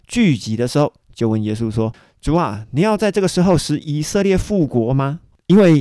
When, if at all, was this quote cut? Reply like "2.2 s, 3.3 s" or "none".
none

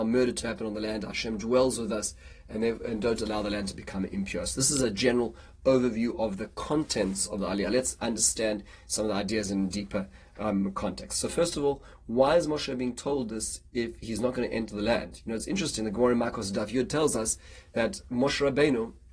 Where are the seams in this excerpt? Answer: none

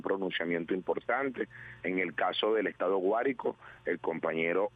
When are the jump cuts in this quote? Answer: 1.8 s

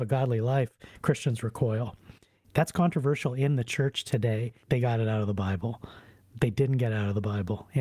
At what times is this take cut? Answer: 2.4 s, 4.6 s

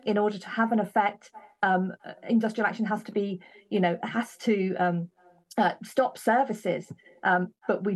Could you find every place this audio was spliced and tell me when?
none

